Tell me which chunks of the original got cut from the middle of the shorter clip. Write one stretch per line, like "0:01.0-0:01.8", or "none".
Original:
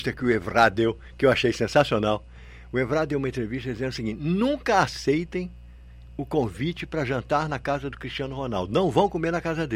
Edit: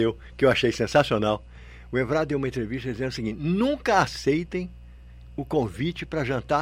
none